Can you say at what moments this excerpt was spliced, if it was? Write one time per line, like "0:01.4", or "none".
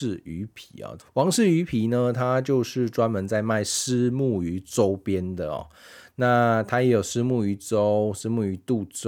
0:01.0